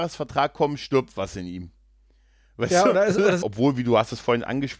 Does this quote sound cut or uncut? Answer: cut